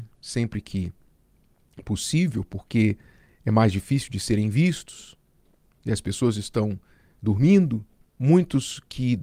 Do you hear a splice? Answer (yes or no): yes